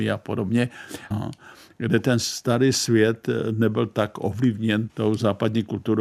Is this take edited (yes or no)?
yes